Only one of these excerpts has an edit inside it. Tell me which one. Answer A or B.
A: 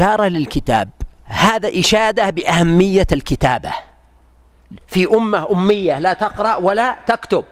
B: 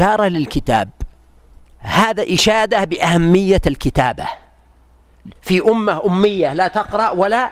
A